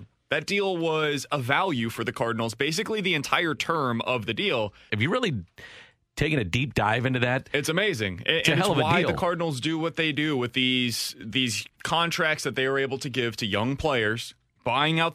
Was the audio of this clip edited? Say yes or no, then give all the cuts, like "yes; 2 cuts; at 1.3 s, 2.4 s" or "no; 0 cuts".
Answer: yes; 1 cut; at 4.9 s